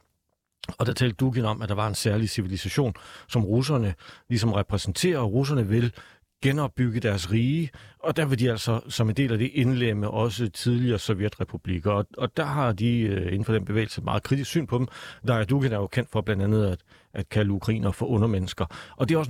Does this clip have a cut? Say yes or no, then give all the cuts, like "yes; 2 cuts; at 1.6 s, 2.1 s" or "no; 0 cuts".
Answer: no; 0 cuts